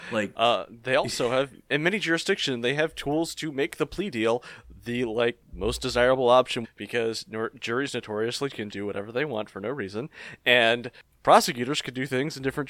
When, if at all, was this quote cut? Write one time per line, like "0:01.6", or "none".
0:06.6
0:08.7